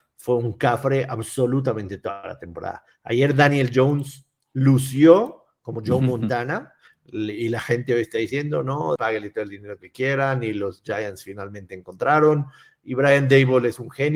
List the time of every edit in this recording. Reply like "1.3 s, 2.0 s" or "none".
6.9 s, 9.0 s